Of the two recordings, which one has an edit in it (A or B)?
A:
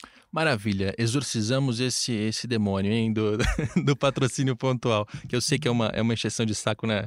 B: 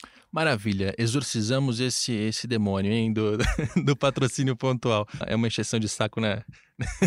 B